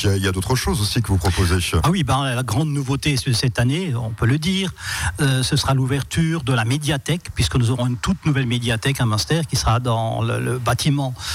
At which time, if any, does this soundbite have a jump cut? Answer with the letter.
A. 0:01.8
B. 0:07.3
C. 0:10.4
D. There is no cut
A